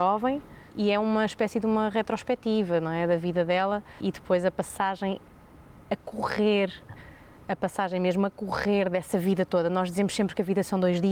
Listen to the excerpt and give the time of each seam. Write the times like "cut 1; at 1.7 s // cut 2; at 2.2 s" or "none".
none